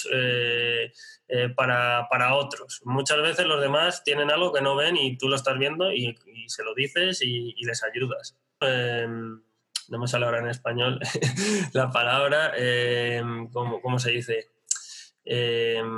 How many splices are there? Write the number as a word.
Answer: one